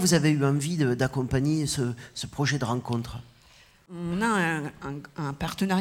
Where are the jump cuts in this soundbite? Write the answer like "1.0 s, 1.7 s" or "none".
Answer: none

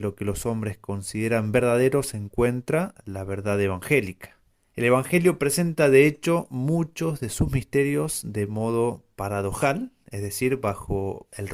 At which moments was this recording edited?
4.7 s

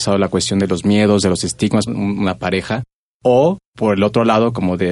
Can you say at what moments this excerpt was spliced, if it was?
1.9 s, 3.7 s

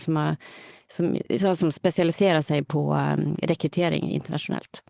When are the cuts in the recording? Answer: none

